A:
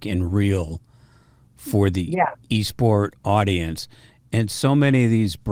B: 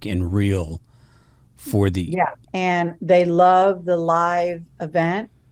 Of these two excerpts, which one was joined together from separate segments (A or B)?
B